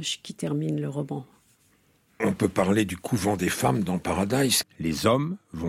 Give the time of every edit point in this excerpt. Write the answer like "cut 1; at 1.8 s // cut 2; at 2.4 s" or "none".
cut 1; at 4.6 s